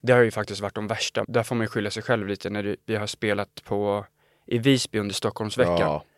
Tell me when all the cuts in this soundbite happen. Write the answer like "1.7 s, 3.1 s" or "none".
1.2 s